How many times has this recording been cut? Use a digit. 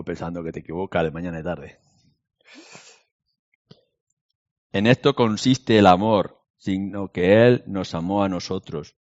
2